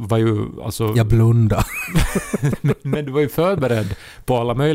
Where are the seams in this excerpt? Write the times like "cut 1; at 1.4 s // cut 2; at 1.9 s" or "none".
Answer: none